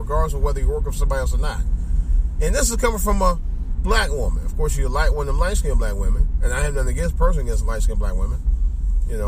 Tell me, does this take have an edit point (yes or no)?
no